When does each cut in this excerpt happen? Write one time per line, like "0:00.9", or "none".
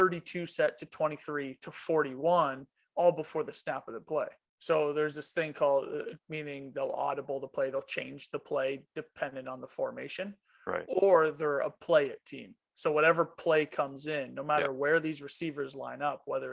0:04.4
0:06.2